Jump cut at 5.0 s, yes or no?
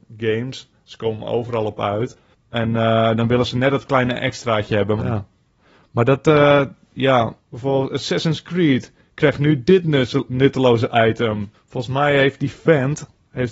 yes